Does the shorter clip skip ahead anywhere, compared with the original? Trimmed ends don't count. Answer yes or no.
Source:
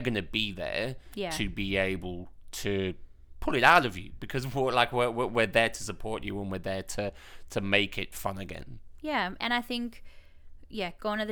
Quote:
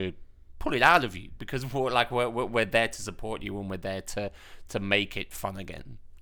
no